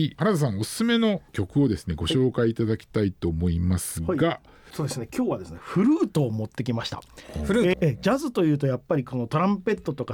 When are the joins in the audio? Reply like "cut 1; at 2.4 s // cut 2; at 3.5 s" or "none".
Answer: cut 1; at 7.7 s